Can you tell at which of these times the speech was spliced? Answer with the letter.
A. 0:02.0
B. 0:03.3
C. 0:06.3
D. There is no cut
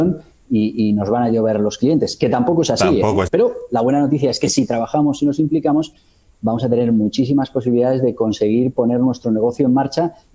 B